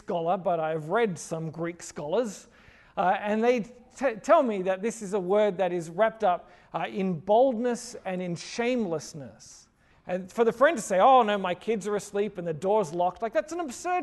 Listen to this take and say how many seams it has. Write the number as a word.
one